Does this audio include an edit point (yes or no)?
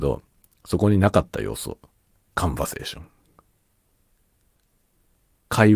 no